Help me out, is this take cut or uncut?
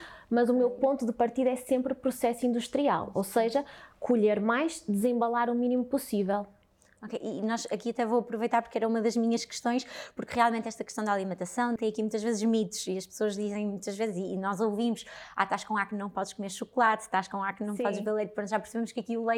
cut